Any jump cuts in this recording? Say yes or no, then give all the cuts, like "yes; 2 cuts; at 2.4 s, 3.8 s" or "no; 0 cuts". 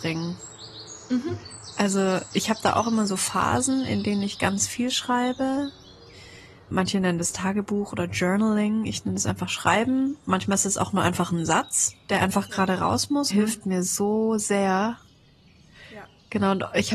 yes; 2 cuts; at 6.7 s, 13.3 s